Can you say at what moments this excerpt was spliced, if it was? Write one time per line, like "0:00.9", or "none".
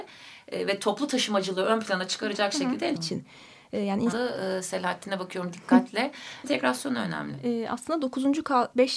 0:02.9
0:04.1
0:06.4